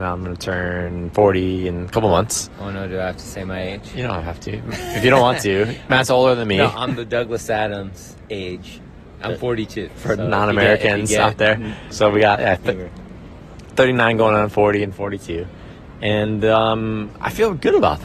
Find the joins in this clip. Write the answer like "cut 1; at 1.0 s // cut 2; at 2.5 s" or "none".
cut 1; at 9.9 s // cut 2; at 11.9 s